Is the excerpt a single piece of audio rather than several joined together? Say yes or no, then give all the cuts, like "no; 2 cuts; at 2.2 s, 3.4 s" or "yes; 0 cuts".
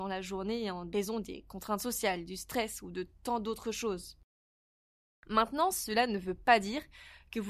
yes; 0 cuts